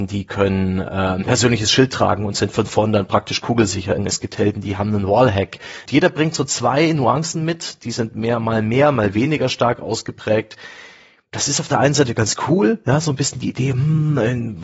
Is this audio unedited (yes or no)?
no